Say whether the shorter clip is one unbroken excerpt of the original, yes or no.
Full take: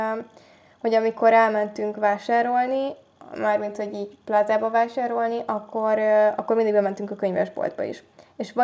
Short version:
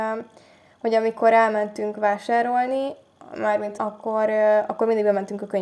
no